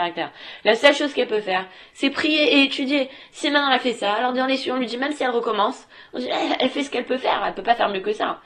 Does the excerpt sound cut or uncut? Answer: uncut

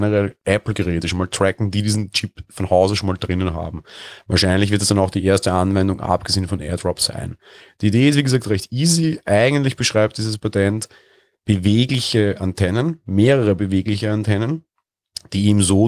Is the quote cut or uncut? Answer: uncut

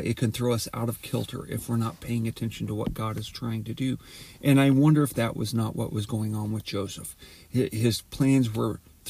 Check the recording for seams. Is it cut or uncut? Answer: uncut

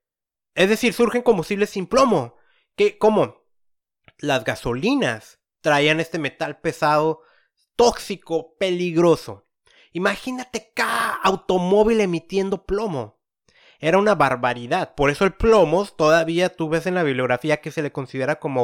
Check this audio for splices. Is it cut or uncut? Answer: uncut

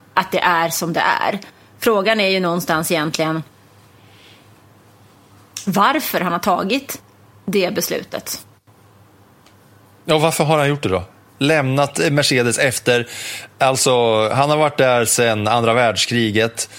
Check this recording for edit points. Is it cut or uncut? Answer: uncut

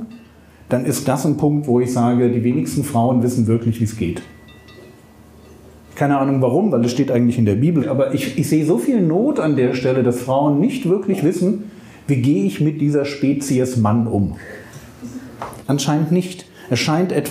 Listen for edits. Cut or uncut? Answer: cut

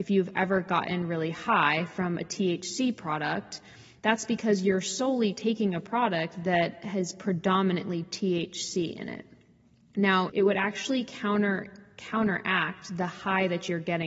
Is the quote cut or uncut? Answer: cut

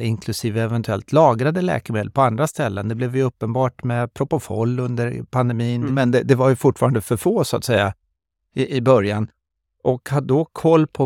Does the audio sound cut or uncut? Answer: cut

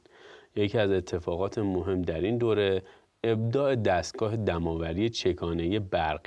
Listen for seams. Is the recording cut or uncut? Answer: uncut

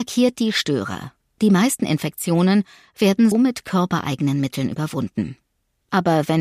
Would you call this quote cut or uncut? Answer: cut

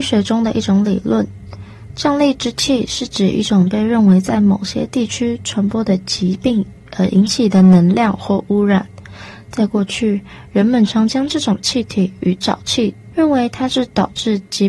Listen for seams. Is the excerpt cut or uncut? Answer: cut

